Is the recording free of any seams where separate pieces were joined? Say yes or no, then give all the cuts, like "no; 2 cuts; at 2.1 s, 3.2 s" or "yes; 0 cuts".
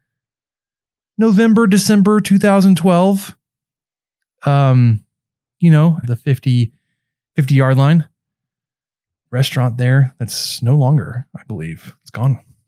no; 1 cut; at 6.0 s